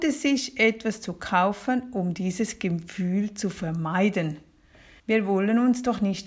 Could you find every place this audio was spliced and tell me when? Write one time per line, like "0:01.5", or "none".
0:05.0